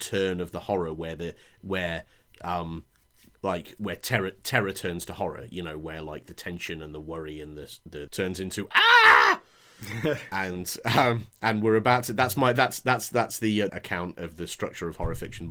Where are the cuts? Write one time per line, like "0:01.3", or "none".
0:08.1
0:13.7